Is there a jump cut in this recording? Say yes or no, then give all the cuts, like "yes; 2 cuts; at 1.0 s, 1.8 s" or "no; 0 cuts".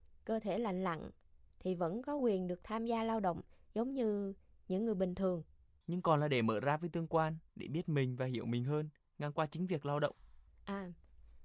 yes; 2 cuts; at 5.8 s, 7.5 s